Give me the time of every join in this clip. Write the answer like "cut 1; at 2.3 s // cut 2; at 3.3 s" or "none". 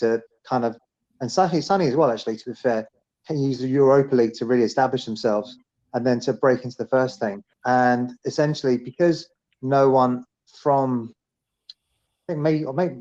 cut 1; at 7.5 s